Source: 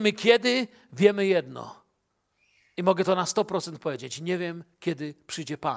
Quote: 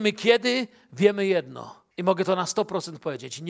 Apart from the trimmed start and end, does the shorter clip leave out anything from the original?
yes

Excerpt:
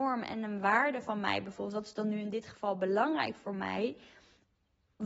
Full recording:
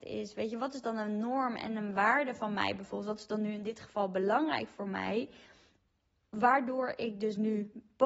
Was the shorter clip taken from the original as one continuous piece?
yes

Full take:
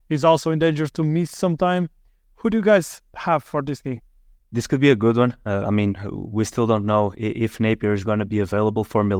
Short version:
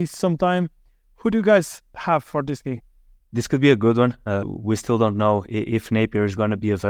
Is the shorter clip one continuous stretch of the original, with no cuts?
no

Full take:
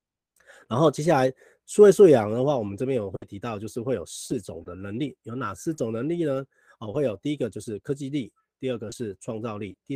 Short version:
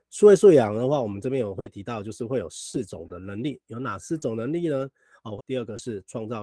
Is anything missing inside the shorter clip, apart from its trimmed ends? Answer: yes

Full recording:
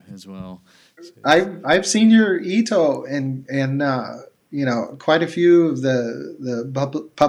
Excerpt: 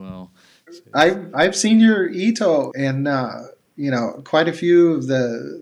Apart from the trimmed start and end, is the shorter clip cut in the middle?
yes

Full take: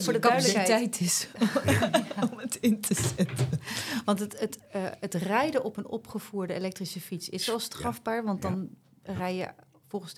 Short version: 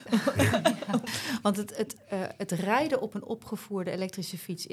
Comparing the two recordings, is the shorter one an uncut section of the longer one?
no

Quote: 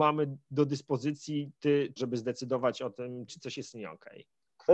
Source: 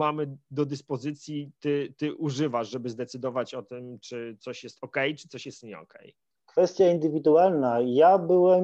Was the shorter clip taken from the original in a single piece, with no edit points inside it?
no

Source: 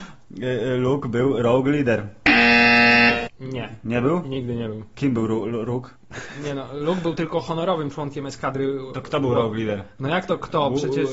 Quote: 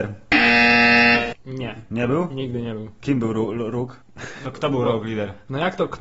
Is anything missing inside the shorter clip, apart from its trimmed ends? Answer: yes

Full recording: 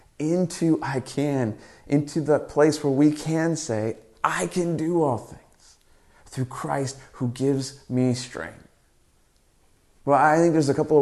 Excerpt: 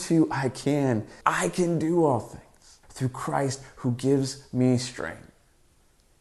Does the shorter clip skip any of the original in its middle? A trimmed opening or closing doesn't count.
yes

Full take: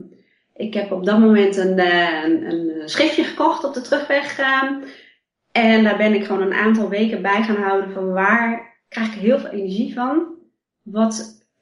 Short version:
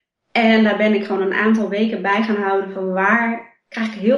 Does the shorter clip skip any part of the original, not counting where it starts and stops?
no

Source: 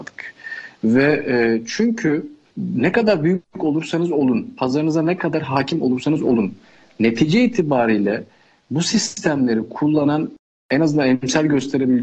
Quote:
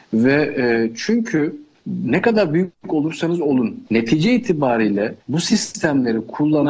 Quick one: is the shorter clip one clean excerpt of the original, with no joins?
no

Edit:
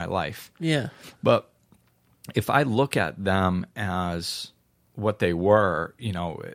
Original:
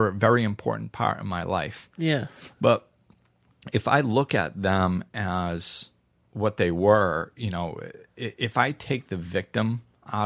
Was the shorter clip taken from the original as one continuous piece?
yes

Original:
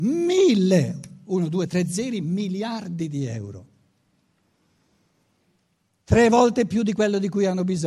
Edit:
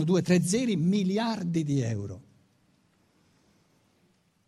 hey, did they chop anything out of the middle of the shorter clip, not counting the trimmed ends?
no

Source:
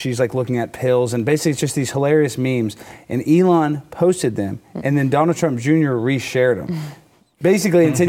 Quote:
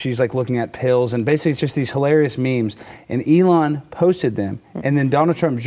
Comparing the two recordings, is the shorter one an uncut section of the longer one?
yes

